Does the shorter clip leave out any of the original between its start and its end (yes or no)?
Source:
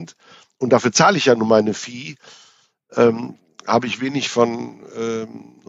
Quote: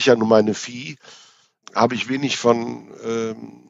yes